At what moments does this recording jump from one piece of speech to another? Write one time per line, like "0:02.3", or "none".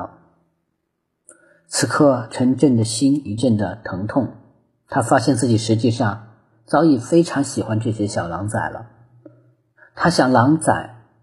0:03.4